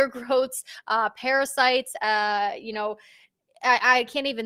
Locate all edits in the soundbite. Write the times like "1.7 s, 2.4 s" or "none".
none